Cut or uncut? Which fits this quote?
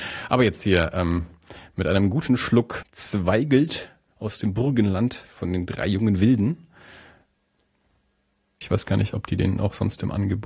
cut